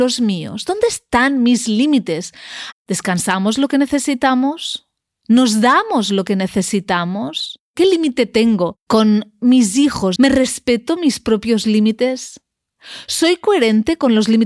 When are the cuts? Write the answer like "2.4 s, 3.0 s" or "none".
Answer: 2.7 s, 10.2 s